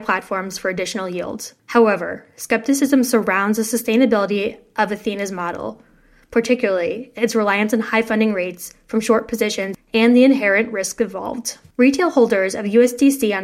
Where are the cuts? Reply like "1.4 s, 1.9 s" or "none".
1.6 s, 11.7 s